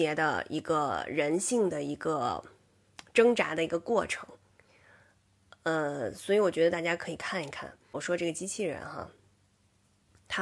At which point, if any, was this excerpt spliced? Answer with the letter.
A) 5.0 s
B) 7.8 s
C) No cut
C